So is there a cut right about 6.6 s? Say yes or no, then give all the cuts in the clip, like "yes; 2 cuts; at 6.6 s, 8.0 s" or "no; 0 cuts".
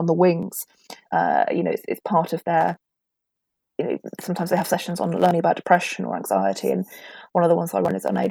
no; 1 cut; at 1.1 s